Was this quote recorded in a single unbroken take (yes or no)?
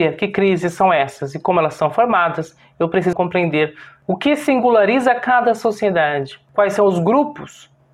no